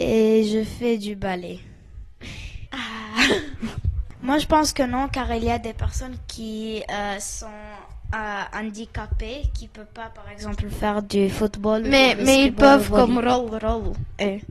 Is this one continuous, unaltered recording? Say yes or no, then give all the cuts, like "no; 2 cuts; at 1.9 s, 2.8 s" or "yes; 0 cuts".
no; 1 cut; at 2.7 s